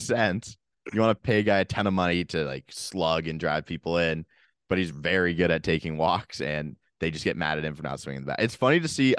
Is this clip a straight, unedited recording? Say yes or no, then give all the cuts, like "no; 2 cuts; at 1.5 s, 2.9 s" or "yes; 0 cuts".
yes; 0 cuts